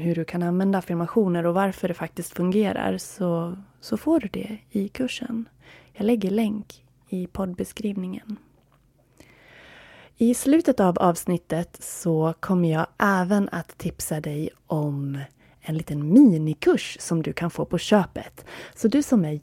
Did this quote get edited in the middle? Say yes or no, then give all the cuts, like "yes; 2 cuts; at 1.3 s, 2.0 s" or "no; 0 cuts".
no; 0 cuts